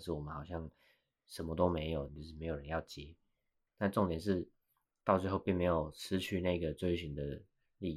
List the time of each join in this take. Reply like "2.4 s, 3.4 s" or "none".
2.1 s, 3.7 s